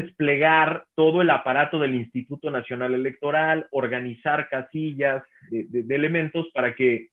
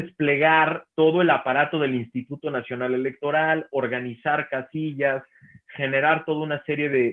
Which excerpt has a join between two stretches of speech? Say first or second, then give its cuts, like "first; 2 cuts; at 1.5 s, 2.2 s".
first; 1 cut; at 5.5 s